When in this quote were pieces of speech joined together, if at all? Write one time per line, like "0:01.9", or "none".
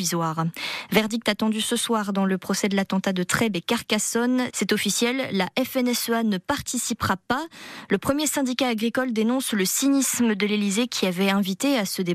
0:04.5